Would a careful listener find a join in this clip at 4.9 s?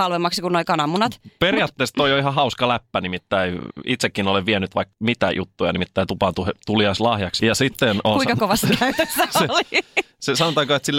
yes; 2 cuts; at 4.9 s, 7.4 s

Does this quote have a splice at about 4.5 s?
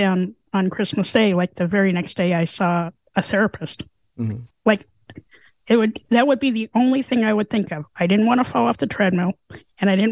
yes; 1 cut; at 4.5 s

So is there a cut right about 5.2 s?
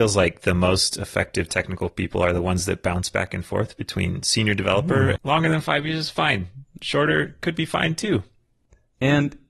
yes; 1 cut; at 5.2 s

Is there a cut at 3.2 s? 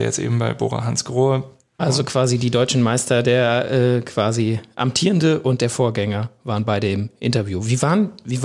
no; 1 cut; at 1.8 s

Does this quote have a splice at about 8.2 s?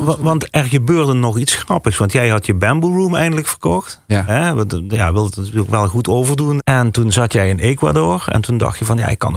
no; 1 cut; at 6.6 s

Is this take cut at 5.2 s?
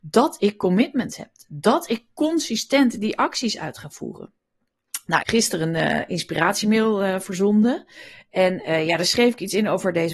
yes; 1 cut; at 5.2 s

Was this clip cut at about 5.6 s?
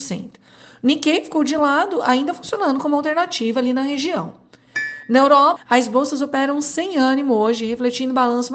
yes; 1 cut; at 5.6 s

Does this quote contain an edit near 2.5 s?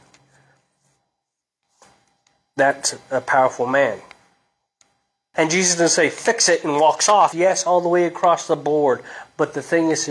no; 2 cuts; at 5.3 s, 7.3 s

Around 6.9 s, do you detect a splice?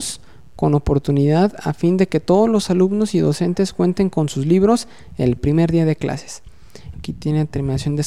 yes; 1 cut; at 6.9 s

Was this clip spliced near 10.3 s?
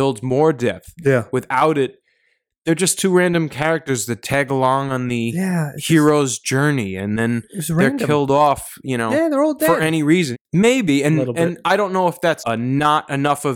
yes; 2 cuts; at 10.3 s, 12.4 s

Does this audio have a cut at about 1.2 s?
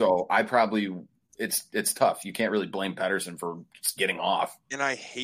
no; 0 cuts

